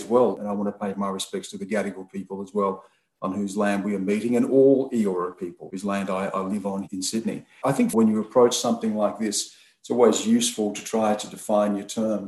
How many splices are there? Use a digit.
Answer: 1